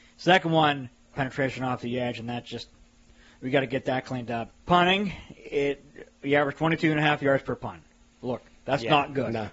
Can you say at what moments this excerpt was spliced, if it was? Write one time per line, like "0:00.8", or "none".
0:01.1